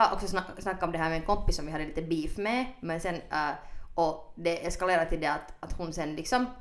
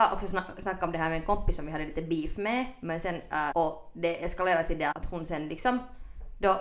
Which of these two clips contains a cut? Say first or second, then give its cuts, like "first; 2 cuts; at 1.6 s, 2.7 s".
second; 2 cuts; at 3.5 s, 4.9 s